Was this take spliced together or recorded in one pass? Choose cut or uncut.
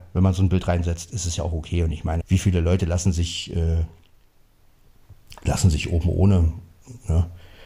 cut